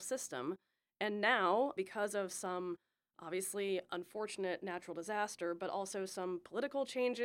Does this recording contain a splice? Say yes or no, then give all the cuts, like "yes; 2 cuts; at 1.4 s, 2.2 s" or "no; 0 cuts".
no; 0 cuts